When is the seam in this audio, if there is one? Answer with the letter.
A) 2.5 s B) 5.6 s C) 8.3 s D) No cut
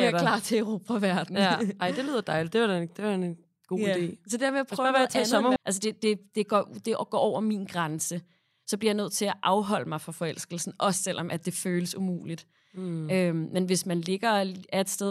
B